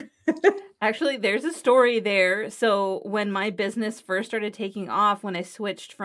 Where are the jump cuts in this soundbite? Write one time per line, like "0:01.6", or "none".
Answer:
none